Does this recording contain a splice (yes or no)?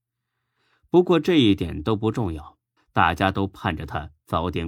yes